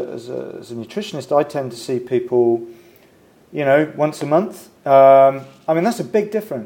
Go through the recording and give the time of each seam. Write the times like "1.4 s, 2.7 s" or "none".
4.8 s